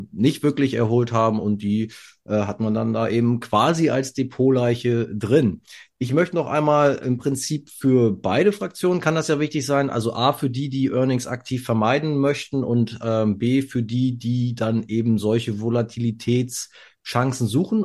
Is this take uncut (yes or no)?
yes